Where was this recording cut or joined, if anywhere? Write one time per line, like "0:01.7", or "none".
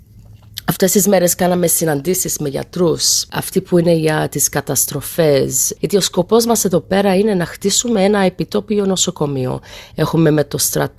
0:09.9